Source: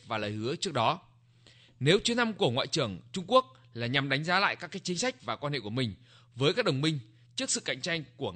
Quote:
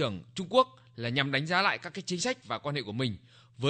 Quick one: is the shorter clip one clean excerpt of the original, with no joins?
yes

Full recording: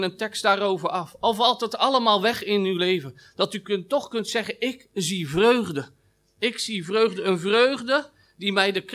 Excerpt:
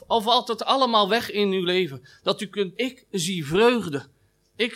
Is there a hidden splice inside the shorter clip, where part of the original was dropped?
yes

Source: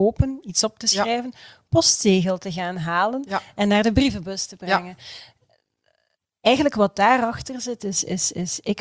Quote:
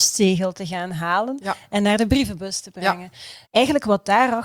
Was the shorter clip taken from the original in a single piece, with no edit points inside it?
no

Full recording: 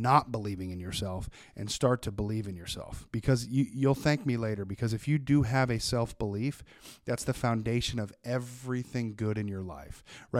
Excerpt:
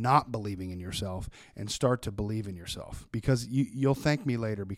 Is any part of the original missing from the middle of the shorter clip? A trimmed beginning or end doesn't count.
no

